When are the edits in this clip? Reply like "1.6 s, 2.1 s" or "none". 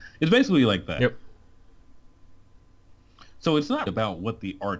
3.9 s